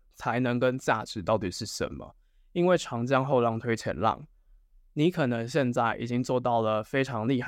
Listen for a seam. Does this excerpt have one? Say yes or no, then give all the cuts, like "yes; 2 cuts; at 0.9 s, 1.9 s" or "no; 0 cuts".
no; 0 cuts